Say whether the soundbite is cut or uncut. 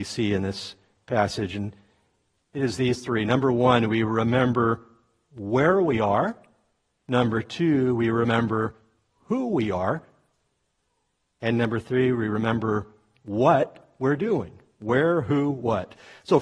uncut